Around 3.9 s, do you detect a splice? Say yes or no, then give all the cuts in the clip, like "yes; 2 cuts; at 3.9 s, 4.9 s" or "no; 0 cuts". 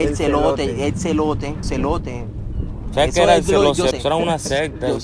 yes; 2 cuts; at 1.6 s, 3.9 s